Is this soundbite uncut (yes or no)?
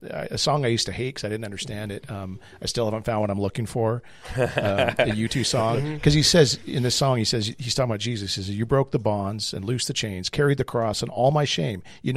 yes